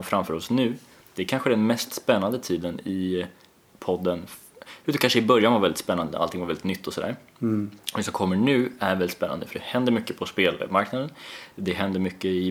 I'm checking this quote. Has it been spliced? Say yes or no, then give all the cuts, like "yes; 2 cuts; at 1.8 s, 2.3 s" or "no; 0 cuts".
no; 0 cuts